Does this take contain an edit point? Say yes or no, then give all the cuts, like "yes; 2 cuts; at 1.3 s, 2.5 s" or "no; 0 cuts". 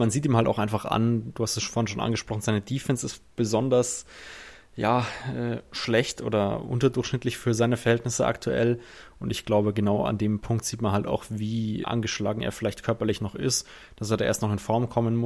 yes; 1 cut; at 11.8 s